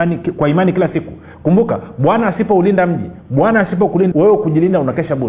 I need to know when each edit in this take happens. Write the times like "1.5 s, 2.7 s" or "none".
4.1 s